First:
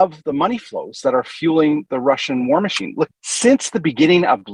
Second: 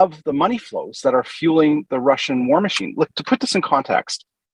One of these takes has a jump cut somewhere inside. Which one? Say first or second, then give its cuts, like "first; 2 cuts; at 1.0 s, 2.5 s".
first; 1 cut; at 3.1 s